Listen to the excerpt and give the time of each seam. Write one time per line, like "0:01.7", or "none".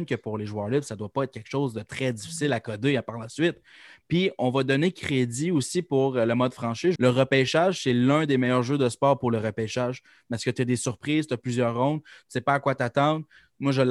0:07.0

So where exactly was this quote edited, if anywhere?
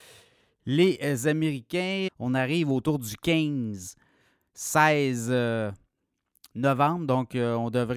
0:02.1

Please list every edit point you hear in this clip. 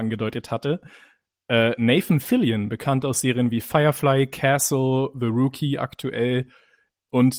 none

